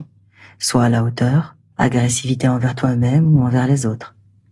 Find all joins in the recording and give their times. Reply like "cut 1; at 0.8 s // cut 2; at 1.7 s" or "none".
cut 1; at 1.7 s